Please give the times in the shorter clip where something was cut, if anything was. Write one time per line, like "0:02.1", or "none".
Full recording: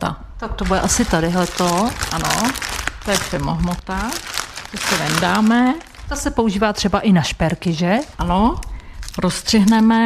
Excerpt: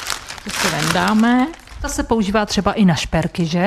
none